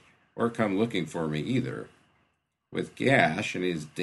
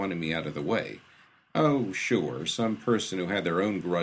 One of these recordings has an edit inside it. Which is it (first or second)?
second